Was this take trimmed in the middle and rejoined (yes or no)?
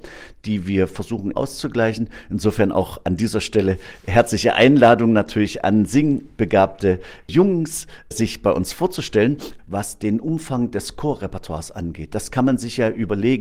yes